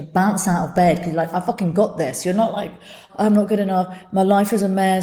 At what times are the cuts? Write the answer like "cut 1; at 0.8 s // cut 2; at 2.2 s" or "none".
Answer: cut 1; at 3.1 s

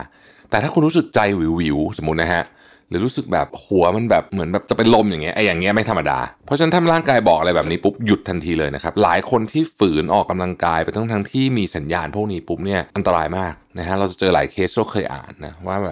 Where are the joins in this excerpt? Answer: cut 1; at 12.9 s

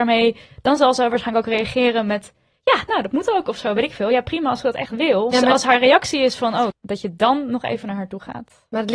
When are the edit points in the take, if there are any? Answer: cut 1; at 5.3 s // cut 2; at 6.7 s

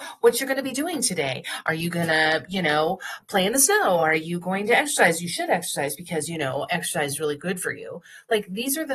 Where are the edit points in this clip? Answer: none

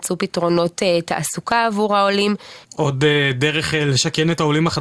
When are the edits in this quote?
cut 1; at 2.6 s

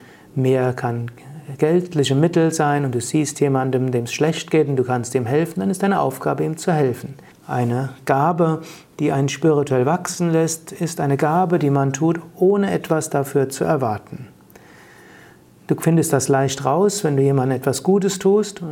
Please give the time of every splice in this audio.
cut 1; at 7.3 s

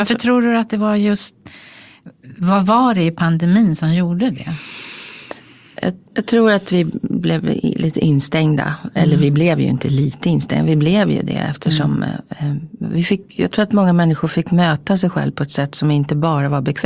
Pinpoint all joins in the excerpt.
none

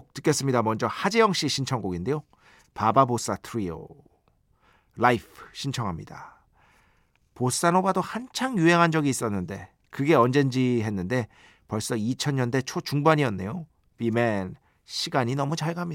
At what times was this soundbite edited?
none

